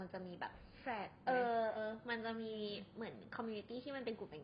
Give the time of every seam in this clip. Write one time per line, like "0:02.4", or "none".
0:01.7